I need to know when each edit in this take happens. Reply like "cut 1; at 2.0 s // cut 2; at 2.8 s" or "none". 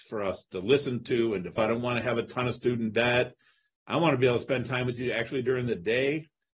cut 1; at 1.6 s